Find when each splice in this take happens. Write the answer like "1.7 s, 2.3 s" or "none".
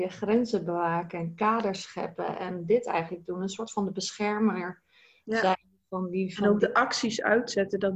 none